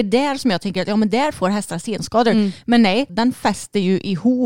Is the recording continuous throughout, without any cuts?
no; 1 cut; at 3.1 s

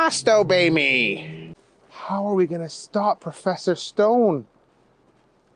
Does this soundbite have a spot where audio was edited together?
no; 0 cuts

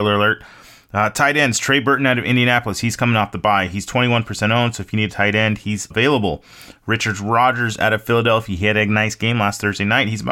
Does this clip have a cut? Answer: yes; 1 cut; at 5.9 s

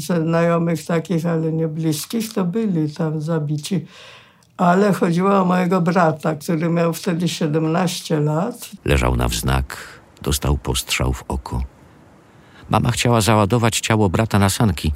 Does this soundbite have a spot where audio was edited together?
yes; 1 cut; at 8.8 s

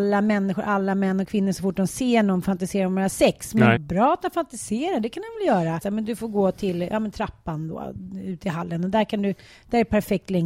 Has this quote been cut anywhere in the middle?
yes; 2 cuts; at 3.8 s, 5.8 s

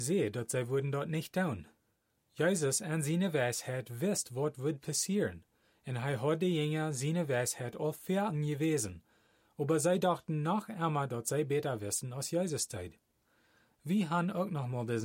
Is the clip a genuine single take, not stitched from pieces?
yes; 0 cuts

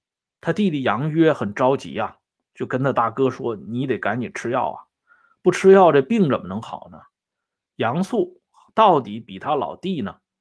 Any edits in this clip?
no; 0 cuts

